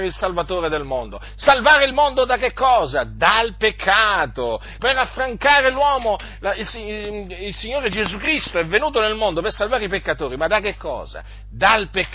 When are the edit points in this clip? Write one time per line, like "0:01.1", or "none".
0:04.8